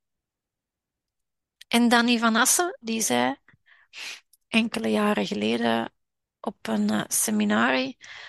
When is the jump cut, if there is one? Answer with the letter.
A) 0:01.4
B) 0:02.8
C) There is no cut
B